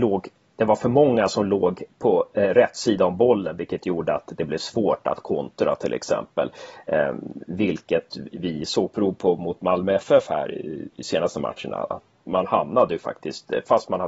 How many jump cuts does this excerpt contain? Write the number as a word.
two